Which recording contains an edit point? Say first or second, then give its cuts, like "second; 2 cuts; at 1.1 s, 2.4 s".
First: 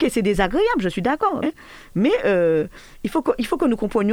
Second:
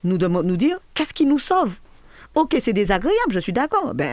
first; 1 cut; at 1.4 s